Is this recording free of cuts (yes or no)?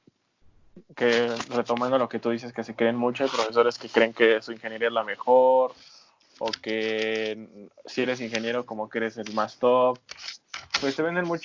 yes